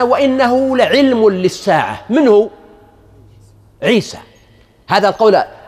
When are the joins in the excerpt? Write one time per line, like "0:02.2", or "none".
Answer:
none